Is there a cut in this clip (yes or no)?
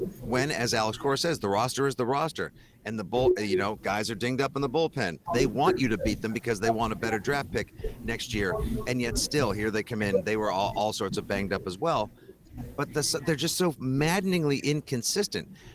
yes